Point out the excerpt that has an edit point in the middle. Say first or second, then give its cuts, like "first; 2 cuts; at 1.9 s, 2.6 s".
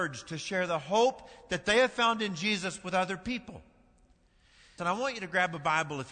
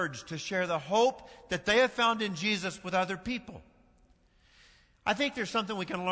first; 1 cut; at 4.8 s